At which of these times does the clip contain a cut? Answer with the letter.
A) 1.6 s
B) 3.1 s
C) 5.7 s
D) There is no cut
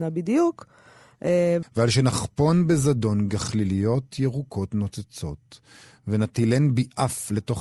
A